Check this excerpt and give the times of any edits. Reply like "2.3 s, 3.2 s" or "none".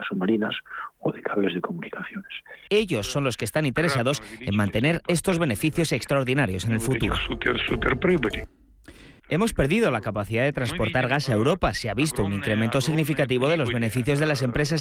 2.7 s, 9.2 s